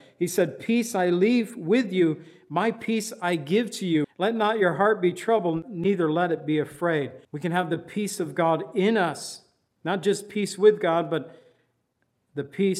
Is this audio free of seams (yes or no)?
no